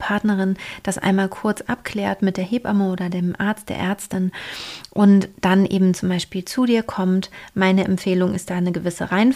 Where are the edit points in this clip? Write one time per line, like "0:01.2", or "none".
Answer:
none